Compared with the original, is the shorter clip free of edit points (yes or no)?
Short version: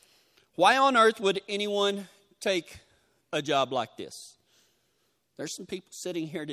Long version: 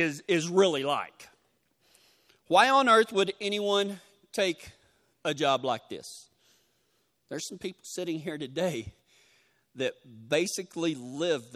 yes